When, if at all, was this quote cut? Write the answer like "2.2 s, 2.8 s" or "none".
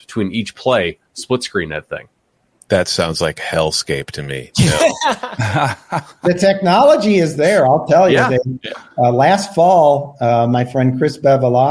none